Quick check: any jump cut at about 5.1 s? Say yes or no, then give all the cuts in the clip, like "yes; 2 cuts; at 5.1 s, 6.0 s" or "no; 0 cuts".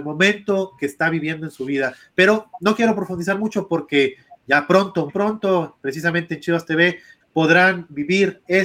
yes; 2 cuts; at 5.1 s, 7.2 s